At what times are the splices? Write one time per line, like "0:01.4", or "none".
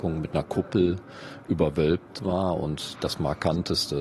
none